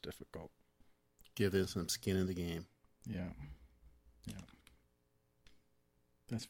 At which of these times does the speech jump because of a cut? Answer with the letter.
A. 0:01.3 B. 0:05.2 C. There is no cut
C